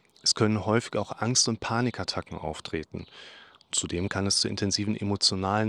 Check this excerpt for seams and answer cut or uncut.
uncut